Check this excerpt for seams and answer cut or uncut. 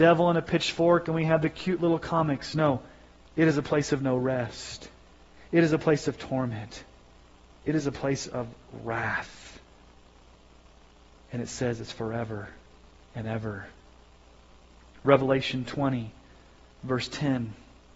uncut